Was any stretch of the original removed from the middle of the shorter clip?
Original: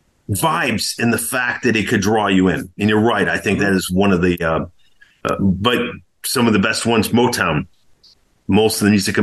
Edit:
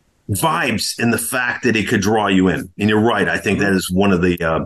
no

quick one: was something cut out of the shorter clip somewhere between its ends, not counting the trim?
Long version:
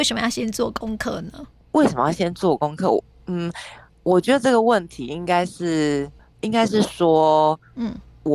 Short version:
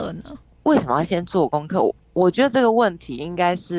yes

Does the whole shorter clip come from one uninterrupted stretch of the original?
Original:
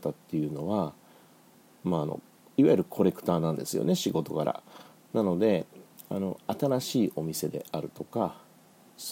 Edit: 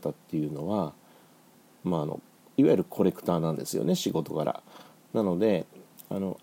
yes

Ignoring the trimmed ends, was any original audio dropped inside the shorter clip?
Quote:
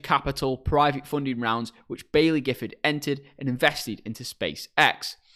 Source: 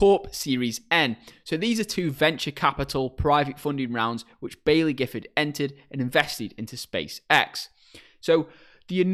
no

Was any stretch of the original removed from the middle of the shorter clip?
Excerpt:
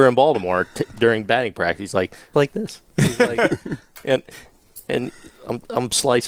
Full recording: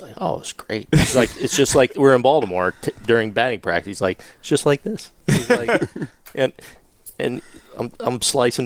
yes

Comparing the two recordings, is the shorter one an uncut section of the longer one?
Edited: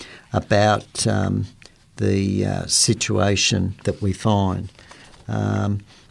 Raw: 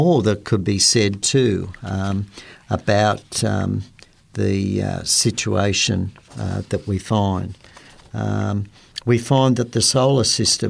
no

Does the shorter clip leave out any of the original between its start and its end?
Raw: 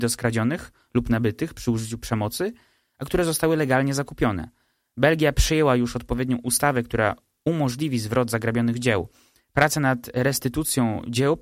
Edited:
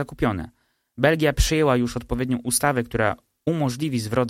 no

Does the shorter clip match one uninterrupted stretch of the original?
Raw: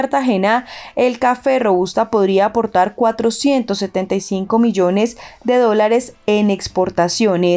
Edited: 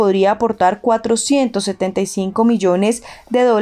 yes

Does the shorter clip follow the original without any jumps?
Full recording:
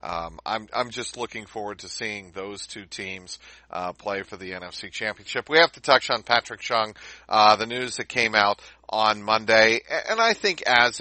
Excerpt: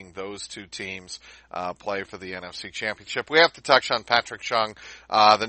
yes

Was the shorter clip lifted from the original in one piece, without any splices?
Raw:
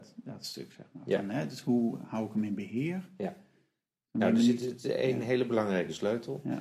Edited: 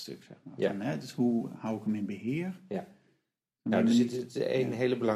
yes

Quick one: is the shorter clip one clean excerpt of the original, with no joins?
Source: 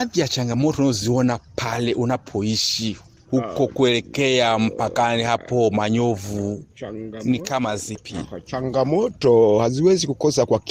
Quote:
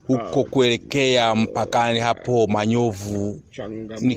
yes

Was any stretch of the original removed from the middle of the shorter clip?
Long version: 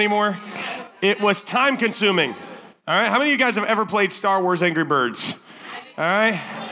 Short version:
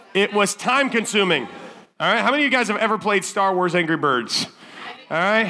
no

